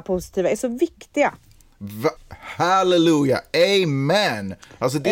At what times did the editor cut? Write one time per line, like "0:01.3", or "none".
0:02.2